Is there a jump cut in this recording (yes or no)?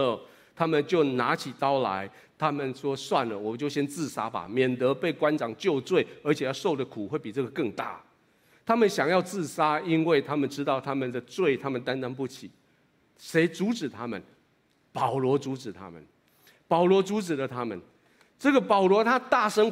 no